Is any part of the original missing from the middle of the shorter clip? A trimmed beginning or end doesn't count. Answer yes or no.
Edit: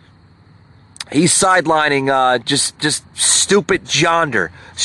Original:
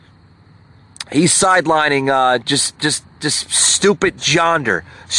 yes